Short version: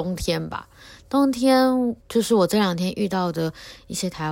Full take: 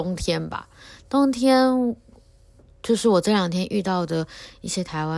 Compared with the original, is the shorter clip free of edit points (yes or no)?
no